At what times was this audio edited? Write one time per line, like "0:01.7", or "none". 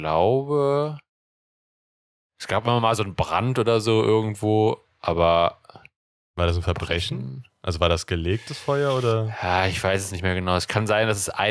none